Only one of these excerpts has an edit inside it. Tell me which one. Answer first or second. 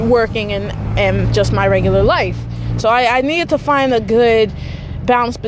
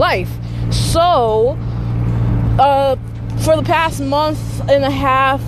first